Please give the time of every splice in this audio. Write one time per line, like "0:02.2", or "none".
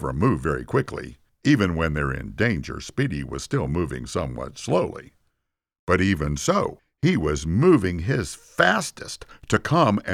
none